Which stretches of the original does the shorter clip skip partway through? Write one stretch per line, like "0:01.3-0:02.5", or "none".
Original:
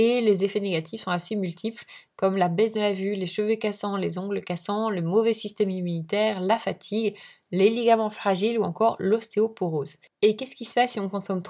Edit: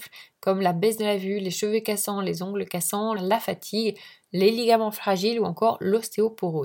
0:04.9-0:06.3